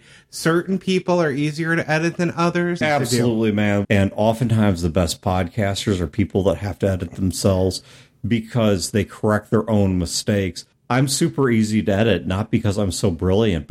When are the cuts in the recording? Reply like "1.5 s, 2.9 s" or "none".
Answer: 2.8 s, 3.8 s